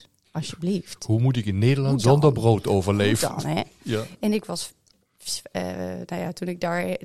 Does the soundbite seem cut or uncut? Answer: uncut